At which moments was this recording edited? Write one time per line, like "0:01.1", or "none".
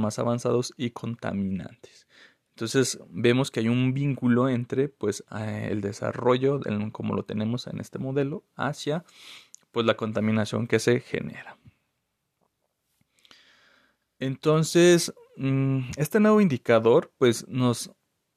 none